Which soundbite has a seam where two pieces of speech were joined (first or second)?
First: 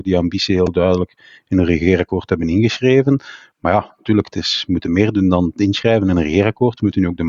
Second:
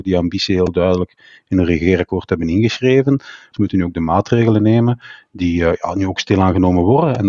second